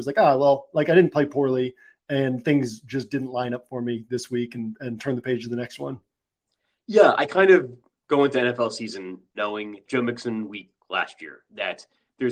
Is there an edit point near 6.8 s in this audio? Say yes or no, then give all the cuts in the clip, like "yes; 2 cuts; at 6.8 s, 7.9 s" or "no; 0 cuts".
no; 1 cut; at 9.9 s